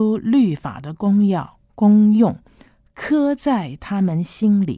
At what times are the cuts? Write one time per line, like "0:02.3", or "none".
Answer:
none